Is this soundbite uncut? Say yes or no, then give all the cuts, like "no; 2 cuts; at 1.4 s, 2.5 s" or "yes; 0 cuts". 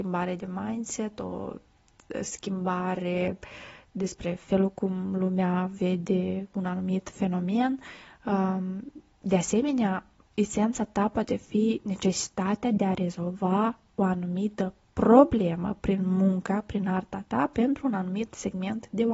yes; 0 cuts